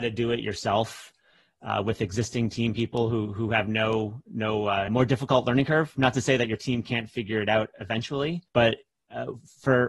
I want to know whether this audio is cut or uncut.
cut